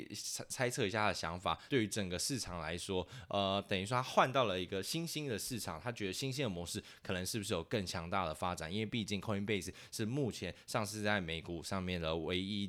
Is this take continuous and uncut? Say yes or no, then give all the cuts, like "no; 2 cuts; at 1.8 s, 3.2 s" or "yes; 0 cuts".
no; 1 cut; at 1.7 s